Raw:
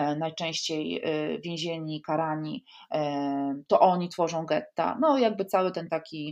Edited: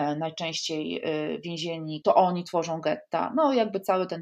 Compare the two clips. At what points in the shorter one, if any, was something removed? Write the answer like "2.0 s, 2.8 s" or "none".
2.0 s